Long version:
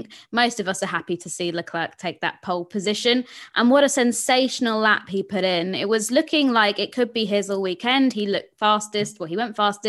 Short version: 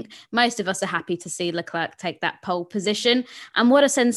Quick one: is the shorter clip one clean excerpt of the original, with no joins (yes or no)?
yes